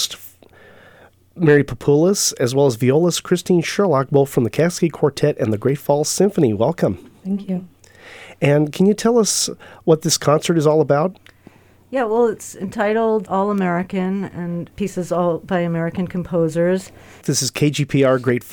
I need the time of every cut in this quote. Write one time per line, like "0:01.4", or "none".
0:13.3
0:14.7
0:17.2